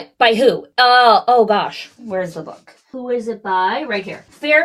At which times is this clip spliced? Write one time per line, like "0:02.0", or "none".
0:02.0

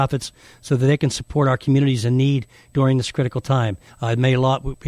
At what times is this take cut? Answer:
0:03.9

